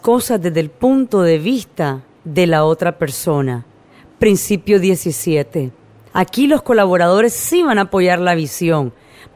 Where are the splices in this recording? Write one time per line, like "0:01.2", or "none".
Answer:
0:06.1